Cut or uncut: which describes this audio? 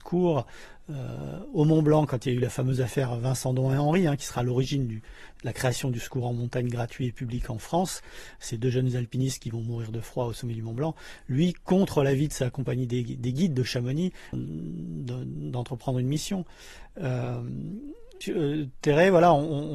cut